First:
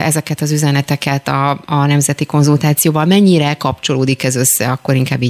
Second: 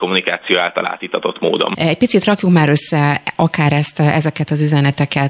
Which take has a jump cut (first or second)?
second